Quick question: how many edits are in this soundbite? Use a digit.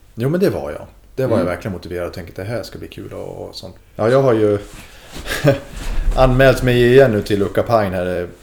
1